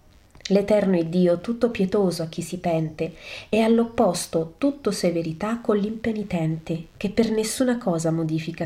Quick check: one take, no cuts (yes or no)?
yes